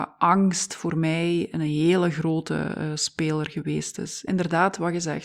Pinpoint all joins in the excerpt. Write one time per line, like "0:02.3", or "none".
0:04.3